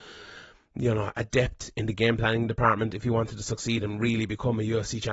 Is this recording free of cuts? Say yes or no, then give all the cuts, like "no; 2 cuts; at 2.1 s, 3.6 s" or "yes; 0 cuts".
yes; 0 cuts